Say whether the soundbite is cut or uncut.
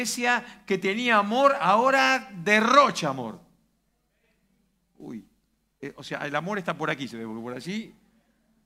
uncut